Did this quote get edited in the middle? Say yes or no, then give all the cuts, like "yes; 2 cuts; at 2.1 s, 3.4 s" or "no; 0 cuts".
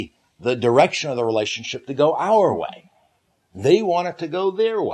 no; 0 cuts